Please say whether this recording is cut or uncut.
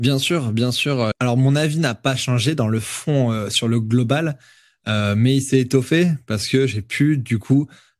cut